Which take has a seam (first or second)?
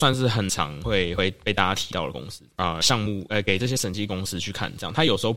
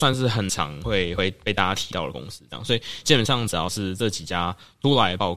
first